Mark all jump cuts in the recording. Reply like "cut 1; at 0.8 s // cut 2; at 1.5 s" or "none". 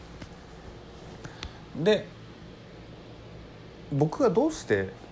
none